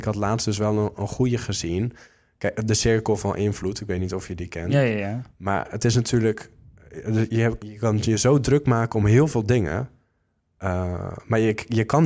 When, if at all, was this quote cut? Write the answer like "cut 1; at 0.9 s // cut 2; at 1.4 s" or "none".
cut 1; at 7.6 s